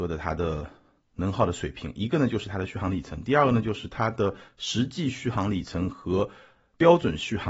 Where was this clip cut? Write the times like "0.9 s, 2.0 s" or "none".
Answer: none